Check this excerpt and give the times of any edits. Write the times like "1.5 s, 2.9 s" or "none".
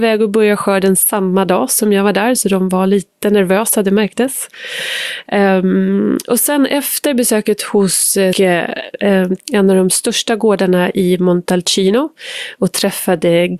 8.3 s, 9.4 s